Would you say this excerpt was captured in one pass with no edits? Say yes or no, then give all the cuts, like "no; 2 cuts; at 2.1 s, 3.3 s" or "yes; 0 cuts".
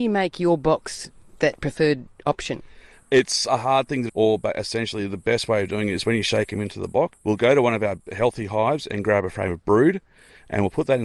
no; 3 cuts; at 2.9 s, 4.1 s, 7.1 s